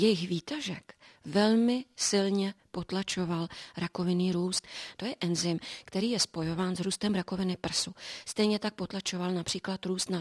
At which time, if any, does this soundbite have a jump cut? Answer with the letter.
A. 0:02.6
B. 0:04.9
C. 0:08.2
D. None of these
B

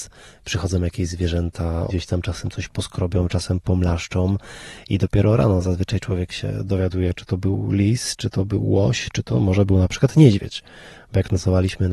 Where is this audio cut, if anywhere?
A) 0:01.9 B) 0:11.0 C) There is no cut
A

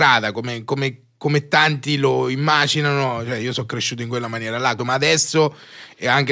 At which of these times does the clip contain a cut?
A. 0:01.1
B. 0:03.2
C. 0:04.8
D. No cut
C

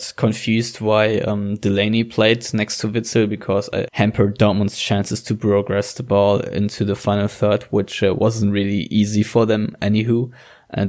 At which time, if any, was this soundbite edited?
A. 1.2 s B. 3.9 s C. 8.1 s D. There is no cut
B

